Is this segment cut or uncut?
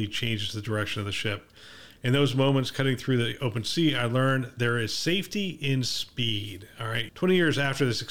cut